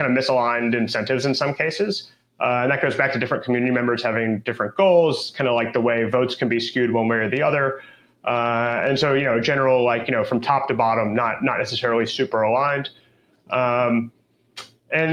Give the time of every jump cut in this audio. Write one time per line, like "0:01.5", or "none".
none